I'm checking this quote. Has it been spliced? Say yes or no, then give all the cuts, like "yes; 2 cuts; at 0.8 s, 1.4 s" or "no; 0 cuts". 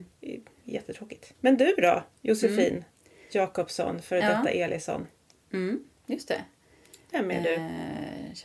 yes; 1 cut; at 1.3 s